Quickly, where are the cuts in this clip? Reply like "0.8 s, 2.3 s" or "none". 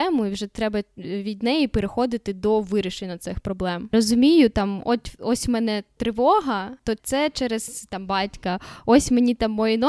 3.9 s